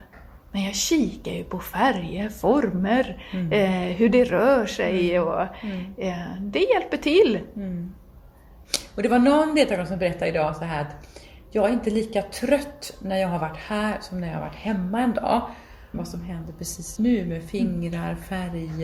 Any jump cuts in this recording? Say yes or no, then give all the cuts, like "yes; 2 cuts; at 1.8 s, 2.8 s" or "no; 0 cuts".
yes; 2 cuts; at 15.9 s, 17.0 s